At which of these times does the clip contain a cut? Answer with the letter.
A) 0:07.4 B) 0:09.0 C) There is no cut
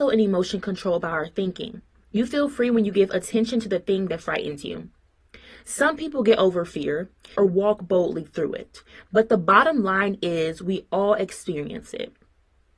A